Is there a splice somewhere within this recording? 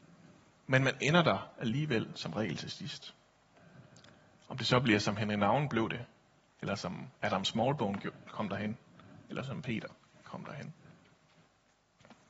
no; 0 cuts

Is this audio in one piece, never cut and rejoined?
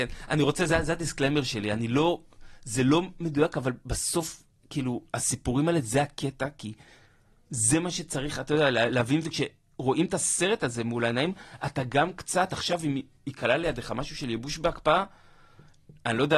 yes; 0 cuts

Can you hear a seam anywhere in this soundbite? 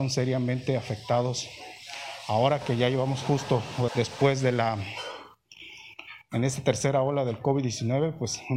yes; 1 cut; at 3.9 s

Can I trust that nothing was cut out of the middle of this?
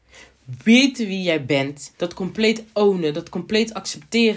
no; 1 cut; at 1.9 s

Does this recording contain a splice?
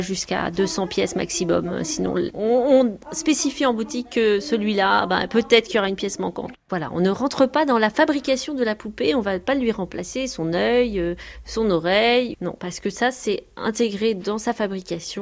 yes; 1 cut; at 6.7 s

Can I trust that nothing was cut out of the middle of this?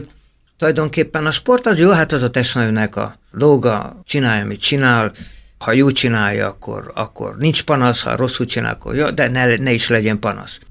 no; 1 cut; at 4.0 s

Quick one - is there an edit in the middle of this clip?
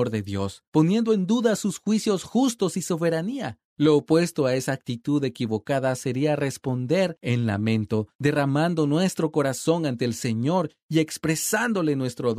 no; 0 cuts

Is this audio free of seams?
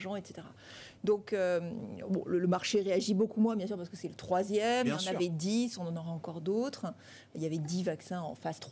yes; 0 cuts

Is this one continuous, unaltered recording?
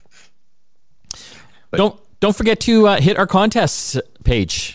yes; 0 cuts

